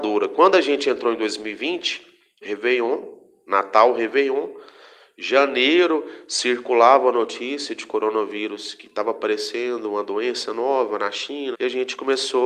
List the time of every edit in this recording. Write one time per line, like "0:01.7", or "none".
0:02.4
0:11.5